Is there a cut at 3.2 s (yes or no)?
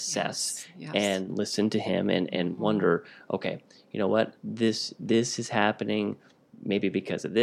no